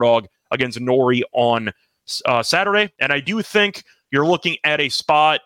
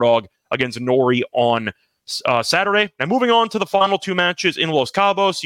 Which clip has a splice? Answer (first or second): first